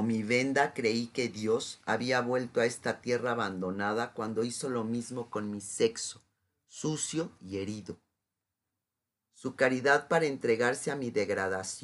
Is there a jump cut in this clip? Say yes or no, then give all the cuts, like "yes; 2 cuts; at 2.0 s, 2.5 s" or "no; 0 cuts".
no; 0 cuts